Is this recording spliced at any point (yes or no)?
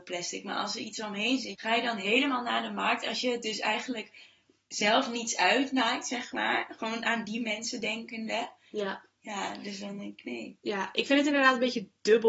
yes